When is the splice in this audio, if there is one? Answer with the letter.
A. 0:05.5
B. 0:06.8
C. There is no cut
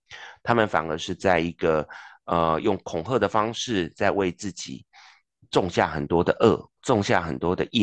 B